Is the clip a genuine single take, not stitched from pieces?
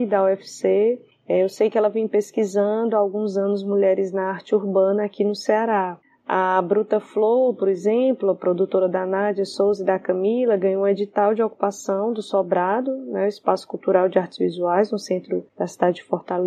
yes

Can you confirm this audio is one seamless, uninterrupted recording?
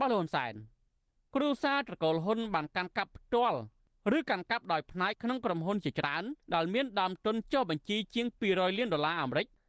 no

